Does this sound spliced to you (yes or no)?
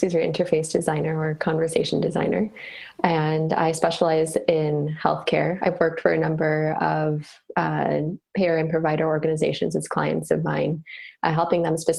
no